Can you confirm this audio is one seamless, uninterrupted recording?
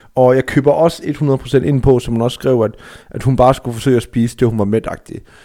yes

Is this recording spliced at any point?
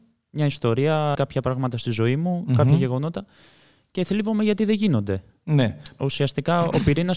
yes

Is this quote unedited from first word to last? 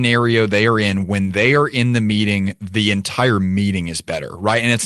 yes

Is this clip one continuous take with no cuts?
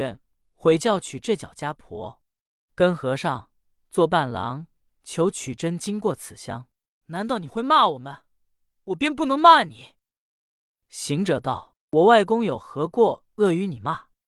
no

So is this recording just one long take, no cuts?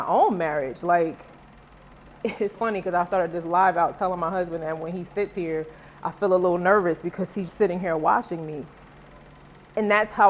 no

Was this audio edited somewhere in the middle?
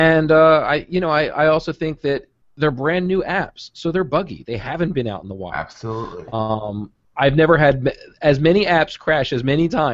no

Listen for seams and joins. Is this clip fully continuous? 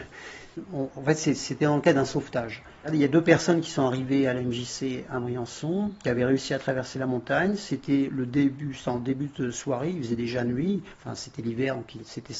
yes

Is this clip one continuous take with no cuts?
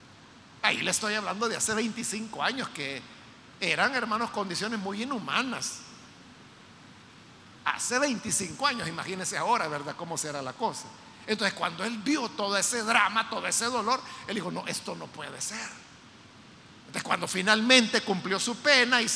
yes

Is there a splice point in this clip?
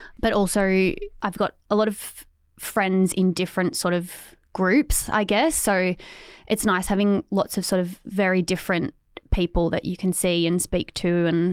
no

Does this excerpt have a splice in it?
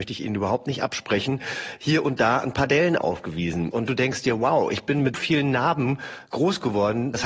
yes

